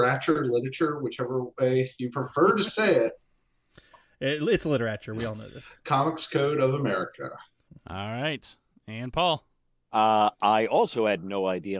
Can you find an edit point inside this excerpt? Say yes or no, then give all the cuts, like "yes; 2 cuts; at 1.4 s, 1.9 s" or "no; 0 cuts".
no; 0 cuts